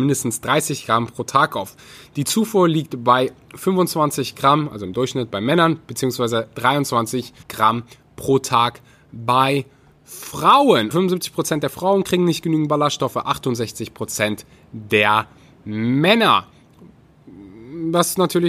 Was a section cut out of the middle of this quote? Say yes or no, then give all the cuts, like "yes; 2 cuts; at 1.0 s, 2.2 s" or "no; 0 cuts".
yes; 2 cuts; at 7.4 s, 10.9 s